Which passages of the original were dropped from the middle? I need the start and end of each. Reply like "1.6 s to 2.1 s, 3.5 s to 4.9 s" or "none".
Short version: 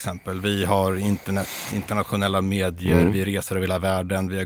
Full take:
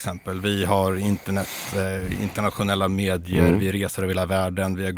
1.7 s to 2.2 s